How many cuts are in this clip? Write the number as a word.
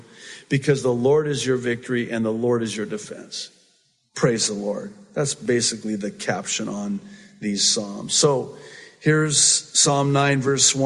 zero